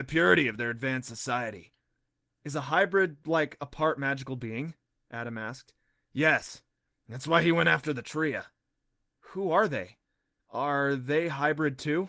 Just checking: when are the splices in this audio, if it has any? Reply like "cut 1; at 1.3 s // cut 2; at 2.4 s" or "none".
cut 1; at 9.2 s

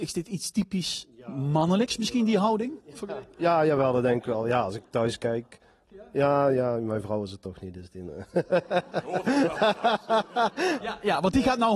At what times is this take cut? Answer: cut 1; at 5.9 s // cut 2; at 10.8 s

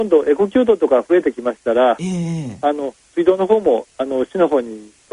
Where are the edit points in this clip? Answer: none

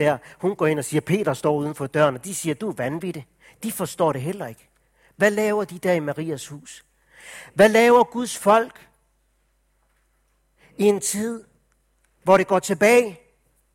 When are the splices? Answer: none

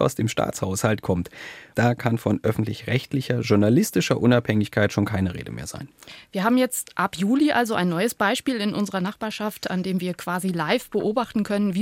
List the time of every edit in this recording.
cut 1; at 1.7 s

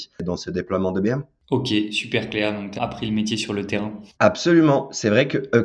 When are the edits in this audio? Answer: cut 1; at 2.8 s // cut 2; at 4.1 s

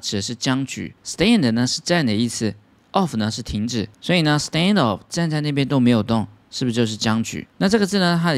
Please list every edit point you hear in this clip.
none

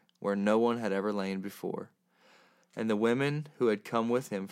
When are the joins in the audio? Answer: cut 1; at 2.6 s

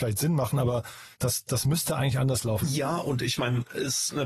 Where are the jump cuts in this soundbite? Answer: cut 1; at 1.1 s // cut 2; at 2.6 s

